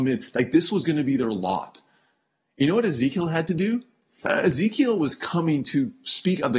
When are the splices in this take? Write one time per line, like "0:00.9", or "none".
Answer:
0:04.2